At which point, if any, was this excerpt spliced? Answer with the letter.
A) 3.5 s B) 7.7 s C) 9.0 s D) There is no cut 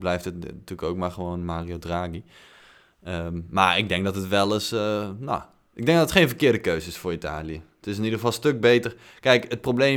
D